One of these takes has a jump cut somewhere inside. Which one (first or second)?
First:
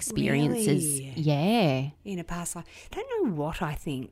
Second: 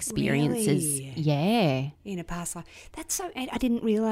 first